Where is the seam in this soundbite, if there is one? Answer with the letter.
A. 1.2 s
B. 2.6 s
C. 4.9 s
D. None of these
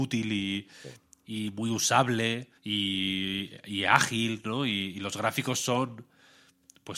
B